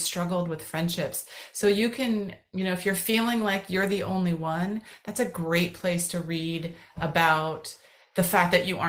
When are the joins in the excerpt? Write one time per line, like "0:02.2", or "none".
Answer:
none